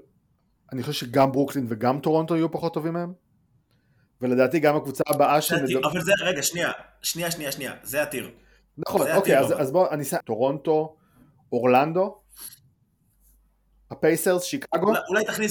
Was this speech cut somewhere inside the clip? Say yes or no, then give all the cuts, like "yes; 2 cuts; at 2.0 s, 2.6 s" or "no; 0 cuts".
yes; 1 cut; at 10.2 s